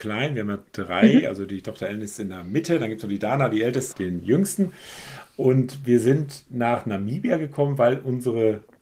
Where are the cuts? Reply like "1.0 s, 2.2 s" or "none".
3.9 s